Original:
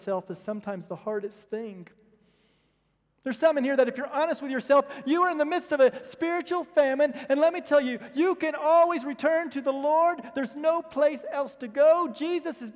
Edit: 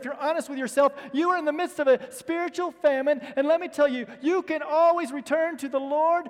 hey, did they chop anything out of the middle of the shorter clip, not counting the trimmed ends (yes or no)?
no